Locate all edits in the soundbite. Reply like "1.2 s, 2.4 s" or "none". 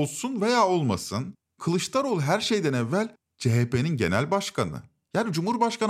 none